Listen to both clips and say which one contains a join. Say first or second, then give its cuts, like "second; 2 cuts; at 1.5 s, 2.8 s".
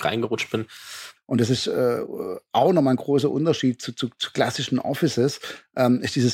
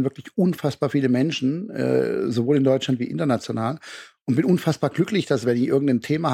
first; 1 cut; at 1.2 s